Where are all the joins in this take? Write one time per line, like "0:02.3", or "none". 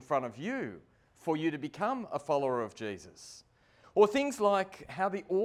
0:03.8